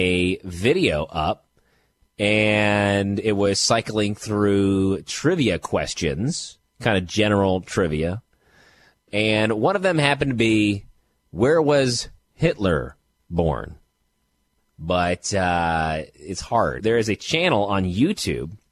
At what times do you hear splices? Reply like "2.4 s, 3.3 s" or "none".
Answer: 14.6 s, 16.8 s